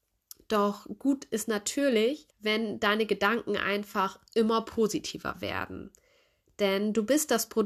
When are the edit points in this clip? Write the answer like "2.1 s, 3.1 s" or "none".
2.3 s